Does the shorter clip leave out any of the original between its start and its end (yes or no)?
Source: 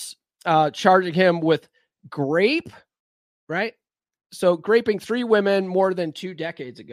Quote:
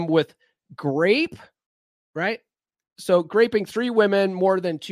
no